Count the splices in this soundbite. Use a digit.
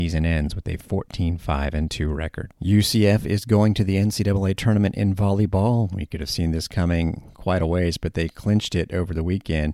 0